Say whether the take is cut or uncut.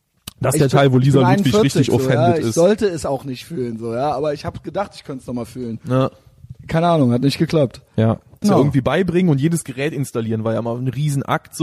cut